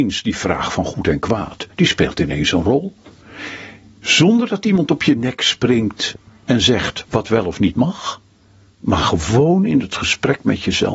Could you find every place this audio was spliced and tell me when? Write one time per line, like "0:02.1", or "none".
none